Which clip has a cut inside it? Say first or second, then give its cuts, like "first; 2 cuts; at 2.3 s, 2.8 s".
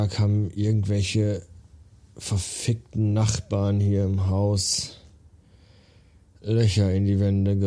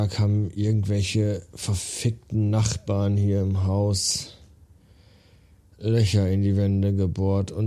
second; 1 cut; at 1.5 s